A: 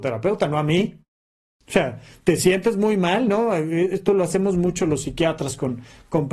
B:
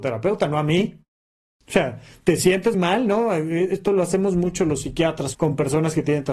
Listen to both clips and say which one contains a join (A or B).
B